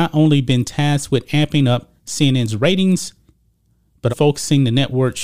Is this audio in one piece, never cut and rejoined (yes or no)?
no